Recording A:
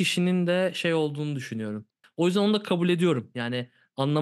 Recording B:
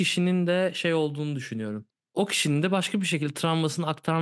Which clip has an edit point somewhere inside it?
A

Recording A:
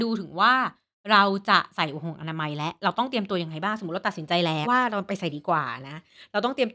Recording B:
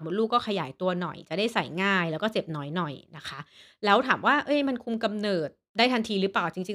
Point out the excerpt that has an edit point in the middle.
A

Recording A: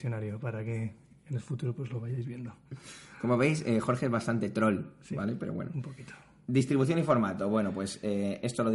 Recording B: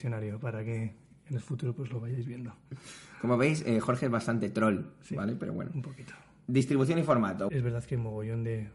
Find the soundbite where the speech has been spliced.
B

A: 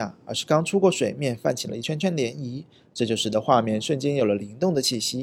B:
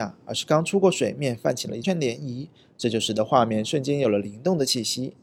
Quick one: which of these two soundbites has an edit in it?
B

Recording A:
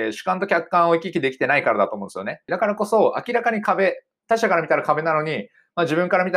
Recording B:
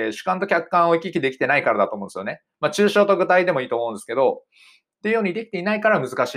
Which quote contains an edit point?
A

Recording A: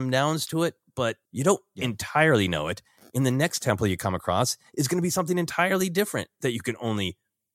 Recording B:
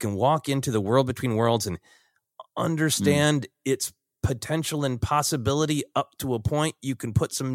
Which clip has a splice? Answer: A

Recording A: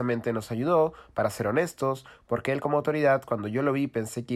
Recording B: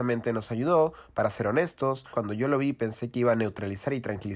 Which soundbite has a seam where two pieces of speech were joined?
B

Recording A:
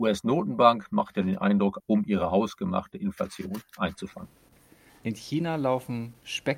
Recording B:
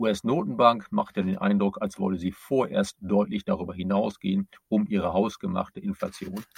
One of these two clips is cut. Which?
A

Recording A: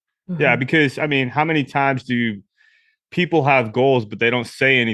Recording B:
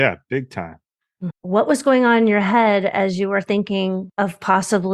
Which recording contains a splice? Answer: B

